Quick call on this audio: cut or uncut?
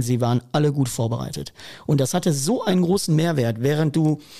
uncut